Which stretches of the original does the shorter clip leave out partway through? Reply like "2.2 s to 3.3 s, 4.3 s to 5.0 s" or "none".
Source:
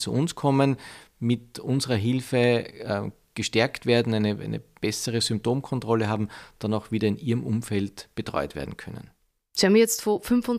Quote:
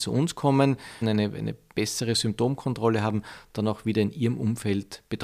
1.0 s to 4.1 s